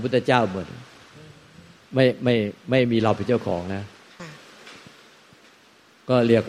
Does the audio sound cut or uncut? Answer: uncut